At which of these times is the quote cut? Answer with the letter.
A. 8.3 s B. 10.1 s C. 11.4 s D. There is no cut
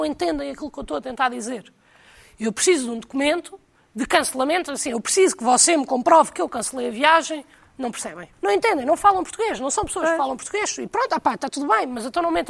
A